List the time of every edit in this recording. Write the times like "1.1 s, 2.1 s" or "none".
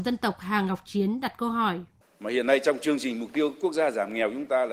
2.0 s